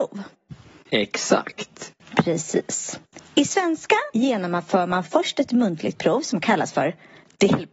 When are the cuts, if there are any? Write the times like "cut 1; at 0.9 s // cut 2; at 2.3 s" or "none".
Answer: cut 1; at 2.0 s // cut 2; at 4.1 s